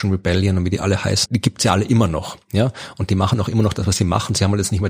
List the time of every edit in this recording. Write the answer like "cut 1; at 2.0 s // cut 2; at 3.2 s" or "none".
cut 1; at 1.3 s